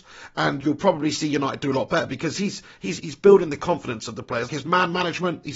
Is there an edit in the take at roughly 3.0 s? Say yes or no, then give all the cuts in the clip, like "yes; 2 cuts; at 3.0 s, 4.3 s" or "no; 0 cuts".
yes; 2 cuts; at 3.0 s, 4.5 s